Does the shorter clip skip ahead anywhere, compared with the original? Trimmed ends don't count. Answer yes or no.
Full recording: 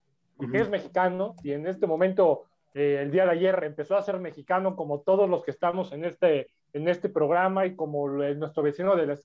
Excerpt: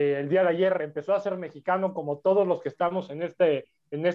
no